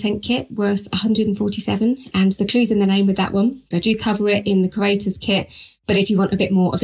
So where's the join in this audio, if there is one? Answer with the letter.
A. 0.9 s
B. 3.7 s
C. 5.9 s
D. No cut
B